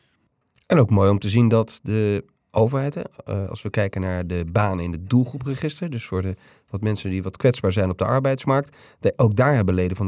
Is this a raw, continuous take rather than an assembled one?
yes; 0 cuts

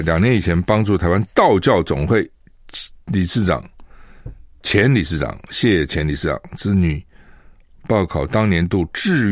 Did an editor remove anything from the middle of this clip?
no; 0 cuts

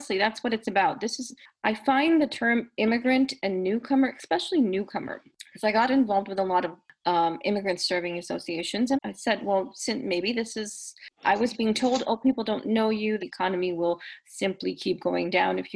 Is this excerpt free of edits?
no; 2 cuts; at 8.9 s, 13.2 s

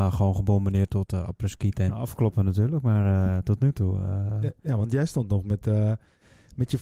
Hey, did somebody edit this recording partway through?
yes; 1 cut; at 1.9 s

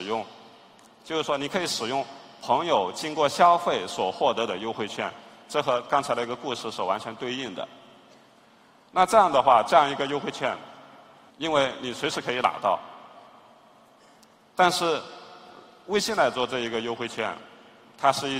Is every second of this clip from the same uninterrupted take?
no; 1 cut; at 11.3 s

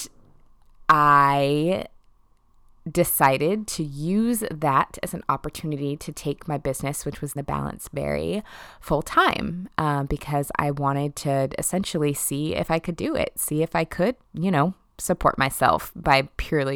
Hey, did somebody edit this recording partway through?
yes; 2 cuts; at 7.4 s, 14.2 s

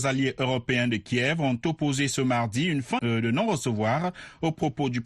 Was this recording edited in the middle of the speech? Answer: yes; 1 cut; at 3.0 s

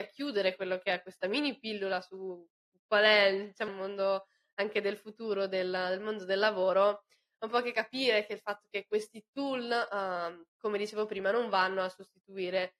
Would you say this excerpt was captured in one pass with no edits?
no; 2 cuts; at 3.7 s, 10.5 s

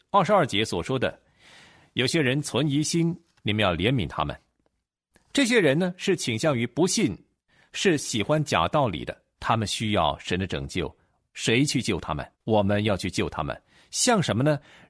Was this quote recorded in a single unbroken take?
no; 2 cuts; at 9.4 s, 12.3 s

